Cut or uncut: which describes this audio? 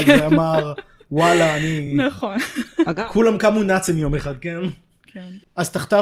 uncut